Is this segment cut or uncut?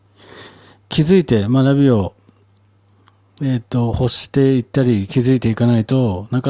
uncut